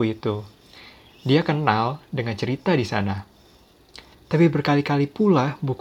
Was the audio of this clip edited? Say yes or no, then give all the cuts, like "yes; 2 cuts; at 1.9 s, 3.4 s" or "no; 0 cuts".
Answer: yes; 1 cut; at 4.1 s